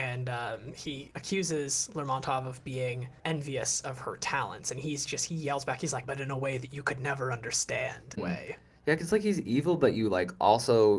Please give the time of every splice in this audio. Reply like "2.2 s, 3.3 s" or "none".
6.0 s, 8.2 s